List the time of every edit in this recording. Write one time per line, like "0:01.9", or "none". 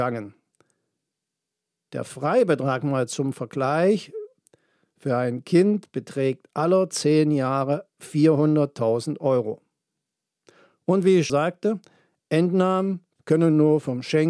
0:11.3
0:13.2